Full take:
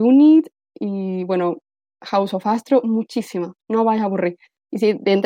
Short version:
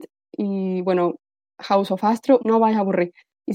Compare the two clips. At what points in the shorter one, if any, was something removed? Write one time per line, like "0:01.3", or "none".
0:02.4